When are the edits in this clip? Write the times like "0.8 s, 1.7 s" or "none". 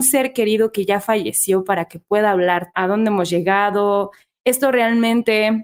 2.7 s